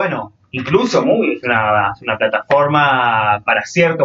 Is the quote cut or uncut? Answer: uncut